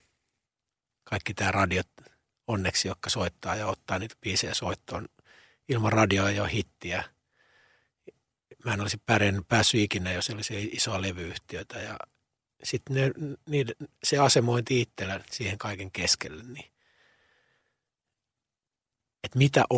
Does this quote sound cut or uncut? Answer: uncut